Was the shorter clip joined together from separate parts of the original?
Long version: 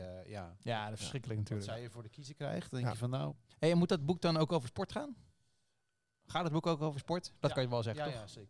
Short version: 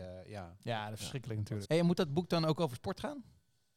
yes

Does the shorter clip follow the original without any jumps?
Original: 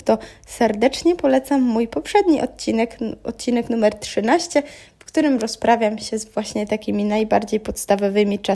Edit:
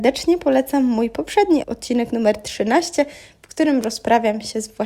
no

